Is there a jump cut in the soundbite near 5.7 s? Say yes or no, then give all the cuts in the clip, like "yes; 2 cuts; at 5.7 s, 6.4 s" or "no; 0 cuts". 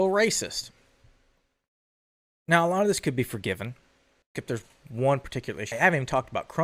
yes; 2 cuts; at 4.2 s, 5.7 s